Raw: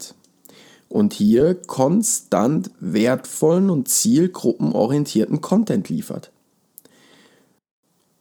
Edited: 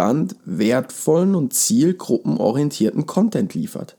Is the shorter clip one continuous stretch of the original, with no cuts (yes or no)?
yes